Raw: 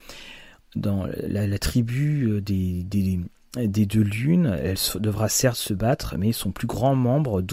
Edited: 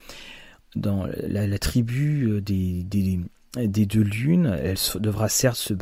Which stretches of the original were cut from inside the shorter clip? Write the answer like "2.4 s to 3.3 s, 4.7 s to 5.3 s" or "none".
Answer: none